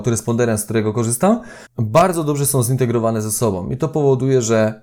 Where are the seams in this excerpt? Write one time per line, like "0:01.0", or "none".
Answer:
0:01.7